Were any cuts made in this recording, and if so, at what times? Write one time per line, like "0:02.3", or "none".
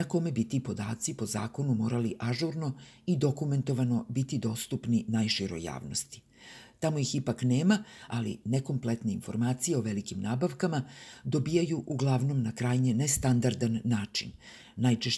0:08.1